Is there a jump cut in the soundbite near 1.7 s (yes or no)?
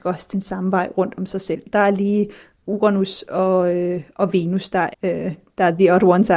no